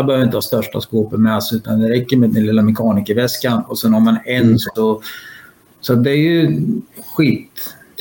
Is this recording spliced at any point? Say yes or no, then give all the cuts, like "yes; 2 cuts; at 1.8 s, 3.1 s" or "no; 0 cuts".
yes; 1 cut; at 4.8 s